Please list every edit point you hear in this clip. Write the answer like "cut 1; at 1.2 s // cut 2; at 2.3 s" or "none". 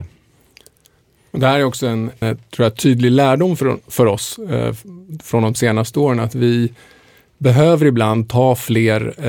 cut 1; at 2.2 s